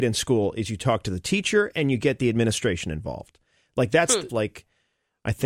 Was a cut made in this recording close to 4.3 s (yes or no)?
yes